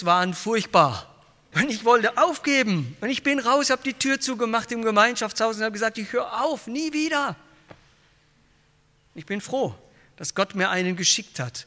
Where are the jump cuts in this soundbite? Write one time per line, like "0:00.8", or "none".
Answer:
0:01.5